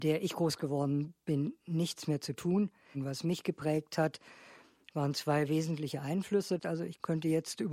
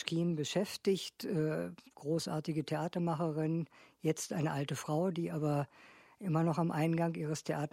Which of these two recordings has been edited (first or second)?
first